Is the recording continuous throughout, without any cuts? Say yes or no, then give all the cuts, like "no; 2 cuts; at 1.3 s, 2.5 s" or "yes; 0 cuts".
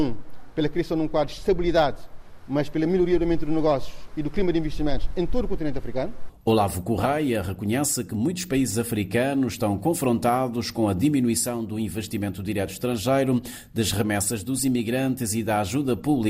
no; 1 cut; at 6.3 s